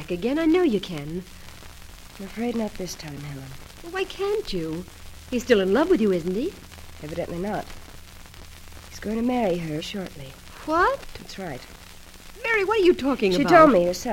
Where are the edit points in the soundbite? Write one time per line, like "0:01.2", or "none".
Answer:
0:09.8